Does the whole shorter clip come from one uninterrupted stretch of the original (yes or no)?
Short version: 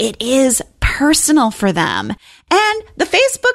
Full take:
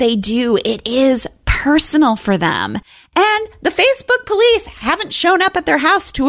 yes